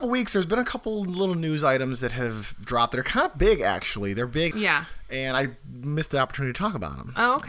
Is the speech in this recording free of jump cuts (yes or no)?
no